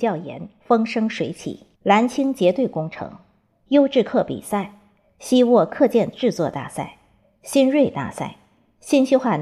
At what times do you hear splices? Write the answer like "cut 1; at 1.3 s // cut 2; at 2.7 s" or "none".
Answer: cut 1; at 1.7 s